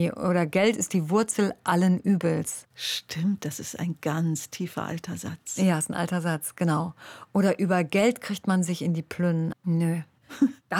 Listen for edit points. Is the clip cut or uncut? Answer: cut